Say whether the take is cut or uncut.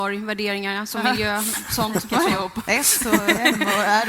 uncut